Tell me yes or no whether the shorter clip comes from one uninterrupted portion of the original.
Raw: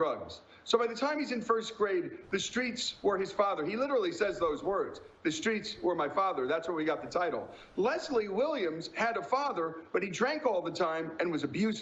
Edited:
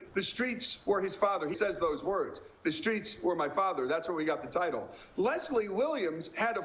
no